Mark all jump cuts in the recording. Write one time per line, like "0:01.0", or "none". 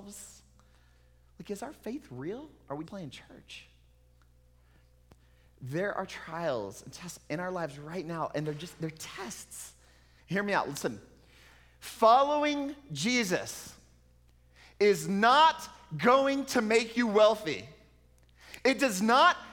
0:02.8
0:10.2